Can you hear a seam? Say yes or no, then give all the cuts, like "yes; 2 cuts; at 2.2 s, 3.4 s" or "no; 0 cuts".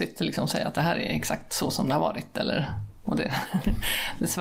no; 0 cuts